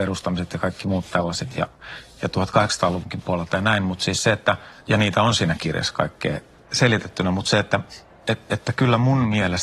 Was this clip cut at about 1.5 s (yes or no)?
no